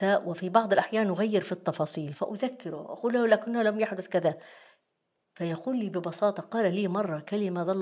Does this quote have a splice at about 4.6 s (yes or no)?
no